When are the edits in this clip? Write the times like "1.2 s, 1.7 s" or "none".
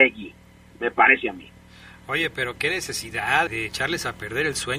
3.5 s